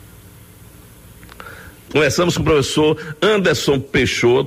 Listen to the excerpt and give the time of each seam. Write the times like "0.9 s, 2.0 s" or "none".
1.9 s